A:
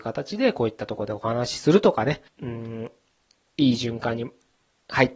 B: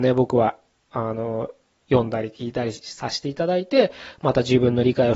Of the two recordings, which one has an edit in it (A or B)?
A